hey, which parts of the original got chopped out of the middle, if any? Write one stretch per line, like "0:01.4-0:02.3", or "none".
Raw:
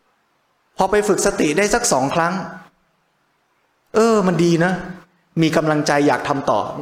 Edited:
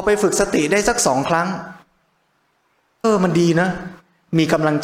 0:03.9-0:04.1